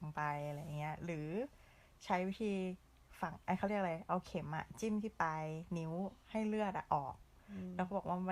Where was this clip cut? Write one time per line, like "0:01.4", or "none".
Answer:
none